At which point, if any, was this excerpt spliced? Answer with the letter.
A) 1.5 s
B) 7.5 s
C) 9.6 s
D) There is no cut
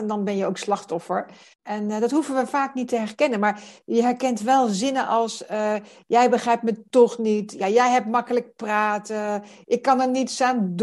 A